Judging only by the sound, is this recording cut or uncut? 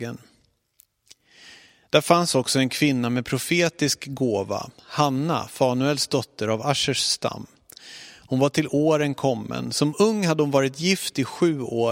uncut